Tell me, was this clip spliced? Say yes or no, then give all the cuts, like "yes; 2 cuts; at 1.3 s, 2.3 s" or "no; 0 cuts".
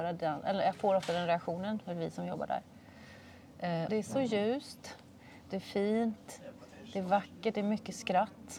yes; 1 cut; at 3.9 s